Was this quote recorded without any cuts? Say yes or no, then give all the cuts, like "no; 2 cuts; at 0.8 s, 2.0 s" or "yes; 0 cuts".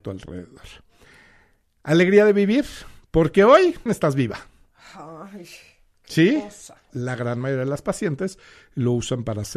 no; 2 cuts; at 3.9 s, 6.9 s